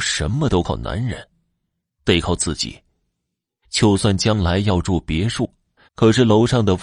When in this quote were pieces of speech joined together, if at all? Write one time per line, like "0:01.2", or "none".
0:05.9